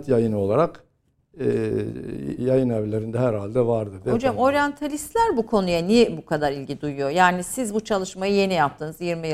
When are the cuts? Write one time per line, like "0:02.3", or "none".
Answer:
0:02.4